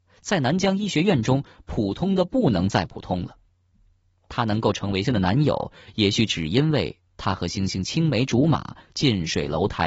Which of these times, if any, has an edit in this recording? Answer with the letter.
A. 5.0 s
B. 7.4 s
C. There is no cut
A